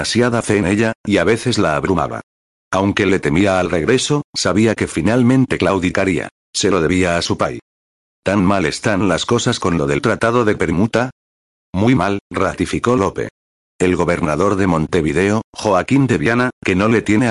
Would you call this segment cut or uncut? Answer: uncut